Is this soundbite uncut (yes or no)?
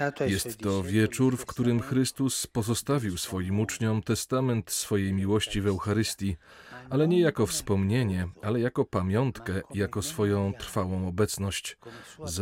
yes